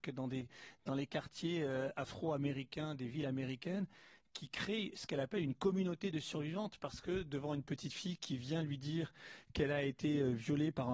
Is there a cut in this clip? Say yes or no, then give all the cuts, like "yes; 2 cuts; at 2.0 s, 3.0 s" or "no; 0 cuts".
no; 0 cuts